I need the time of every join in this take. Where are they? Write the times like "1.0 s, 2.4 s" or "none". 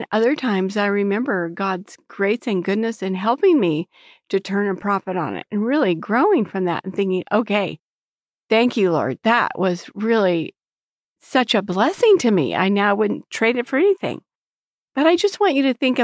none